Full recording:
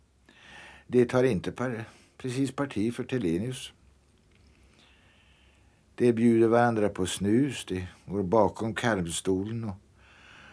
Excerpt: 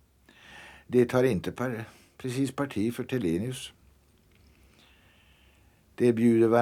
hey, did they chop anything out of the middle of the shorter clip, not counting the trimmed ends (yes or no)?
no